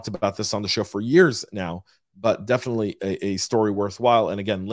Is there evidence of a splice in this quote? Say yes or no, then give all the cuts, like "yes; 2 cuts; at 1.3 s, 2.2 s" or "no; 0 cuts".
no; 0 cuts